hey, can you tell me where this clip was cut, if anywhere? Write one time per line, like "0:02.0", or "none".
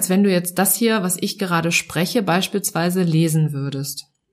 none